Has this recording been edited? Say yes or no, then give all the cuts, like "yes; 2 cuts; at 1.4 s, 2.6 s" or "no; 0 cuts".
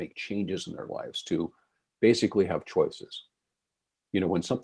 no; 0 cuts